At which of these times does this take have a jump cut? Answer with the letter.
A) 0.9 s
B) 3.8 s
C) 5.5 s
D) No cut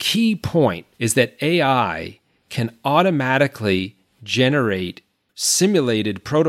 A